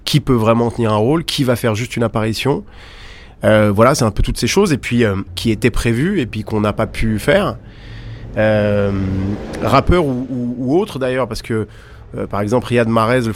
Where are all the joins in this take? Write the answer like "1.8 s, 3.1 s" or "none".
5.3 s